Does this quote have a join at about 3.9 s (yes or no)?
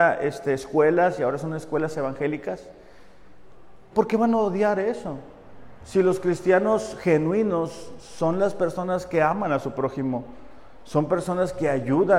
yes